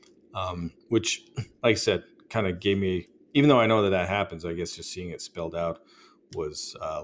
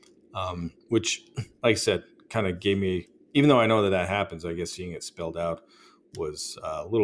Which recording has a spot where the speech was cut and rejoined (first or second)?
second